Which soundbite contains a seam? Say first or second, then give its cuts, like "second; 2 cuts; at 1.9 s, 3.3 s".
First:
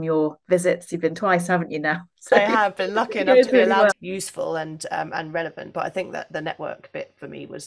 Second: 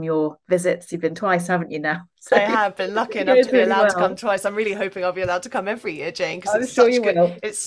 first; 1 cut; at 3.9 s